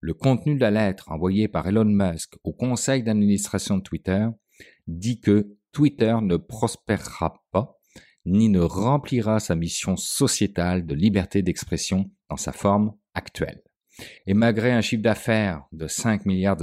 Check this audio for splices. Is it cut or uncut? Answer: cut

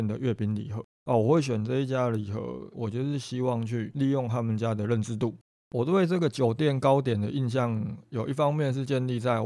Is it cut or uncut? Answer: cut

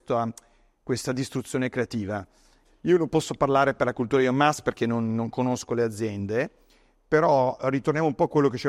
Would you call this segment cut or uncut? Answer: cut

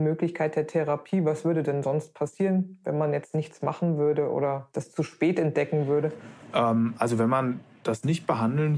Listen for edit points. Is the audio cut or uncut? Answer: cut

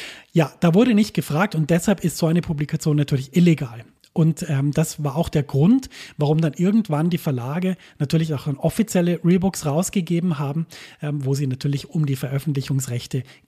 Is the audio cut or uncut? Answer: uncut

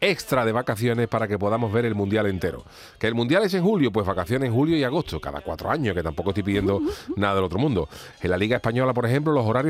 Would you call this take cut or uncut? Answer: cut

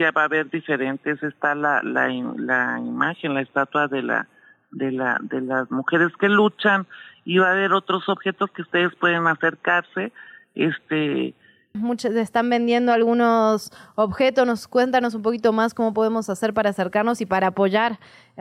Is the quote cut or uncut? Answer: cut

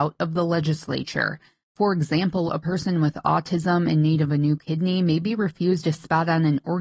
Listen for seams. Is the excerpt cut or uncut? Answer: cut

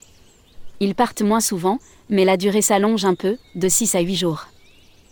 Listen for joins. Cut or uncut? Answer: uncut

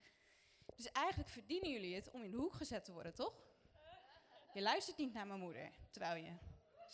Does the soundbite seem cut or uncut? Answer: cut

